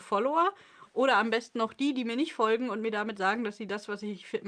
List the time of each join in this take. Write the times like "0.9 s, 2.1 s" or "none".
none